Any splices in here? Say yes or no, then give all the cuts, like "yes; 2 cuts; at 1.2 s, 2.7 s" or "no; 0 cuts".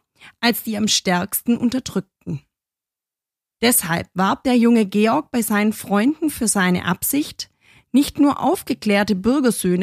yes; 1 cut; at 3.5 s